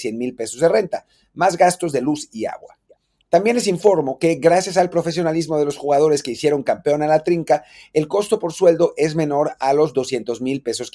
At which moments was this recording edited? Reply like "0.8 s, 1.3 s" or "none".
none